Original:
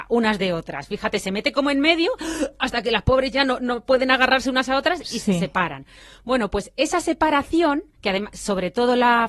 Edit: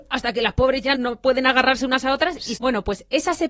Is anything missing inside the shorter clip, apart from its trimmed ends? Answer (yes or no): yes